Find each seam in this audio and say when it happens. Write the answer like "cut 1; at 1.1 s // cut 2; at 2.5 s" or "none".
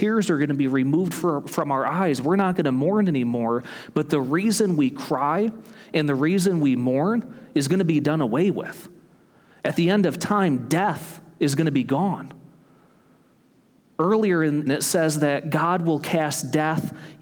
cut 1; at 14.7 s